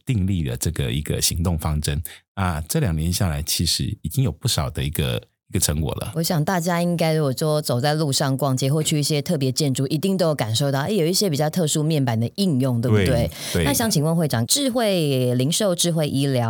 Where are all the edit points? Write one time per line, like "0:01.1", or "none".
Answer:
0:14.5